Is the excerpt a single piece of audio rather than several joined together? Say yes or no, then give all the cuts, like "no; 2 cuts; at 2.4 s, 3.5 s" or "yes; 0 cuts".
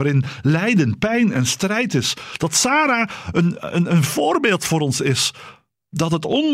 yes; 0 cuts